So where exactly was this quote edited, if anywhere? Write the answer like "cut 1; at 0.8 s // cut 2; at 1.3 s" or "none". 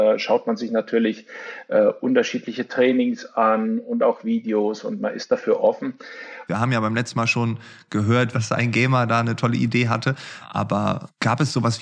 cut 1; at 6.5 s // cut 2; at 8.3 s